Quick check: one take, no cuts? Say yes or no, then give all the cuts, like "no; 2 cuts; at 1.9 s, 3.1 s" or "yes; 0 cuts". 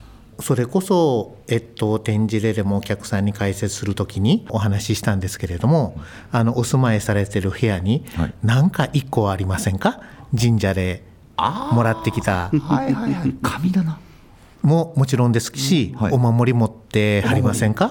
yes; 0 cuts